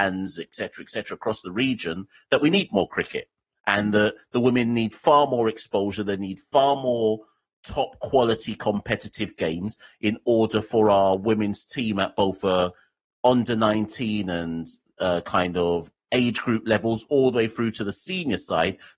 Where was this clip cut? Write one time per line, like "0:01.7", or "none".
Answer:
none